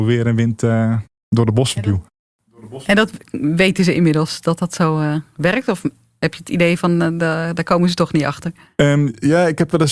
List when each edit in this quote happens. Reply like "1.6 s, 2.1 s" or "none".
none